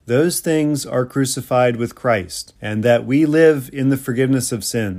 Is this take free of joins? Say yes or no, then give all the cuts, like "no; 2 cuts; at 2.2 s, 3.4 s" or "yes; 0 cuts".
no; 1 cut; at 2.6 s